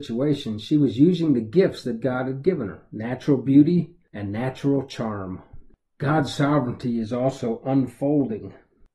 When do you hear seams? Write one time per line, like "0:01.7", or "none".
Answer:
none